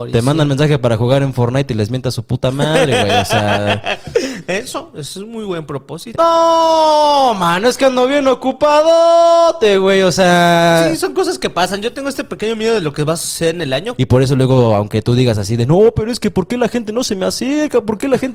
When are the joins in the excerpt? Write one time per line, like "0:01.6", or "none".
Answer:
0:06.1
0:14.0